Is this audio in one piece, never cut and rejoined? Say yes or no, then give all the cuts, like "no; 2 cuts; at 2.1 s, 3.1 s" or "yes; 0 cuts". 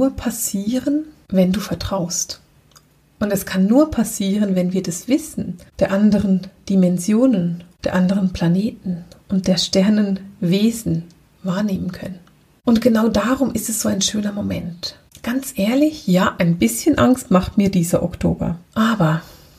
no; 1 cut; at 18.6 s